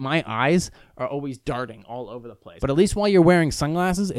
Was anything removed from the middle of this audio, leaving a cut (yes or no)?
yes